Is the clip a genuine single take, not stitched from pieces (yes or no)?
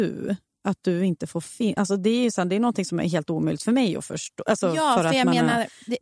yes